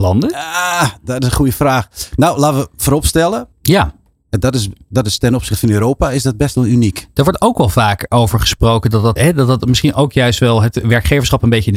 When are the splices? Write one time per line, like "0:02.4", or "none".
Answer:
0:03.5
0:09.2